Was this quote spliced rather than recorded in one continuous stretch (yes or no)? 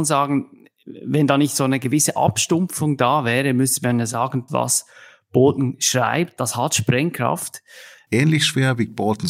yes